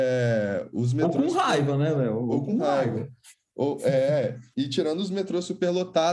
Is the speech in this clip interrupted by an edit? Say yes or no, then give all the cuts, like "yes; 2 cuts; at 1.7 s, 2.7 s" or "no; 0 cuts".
no; 0 cuts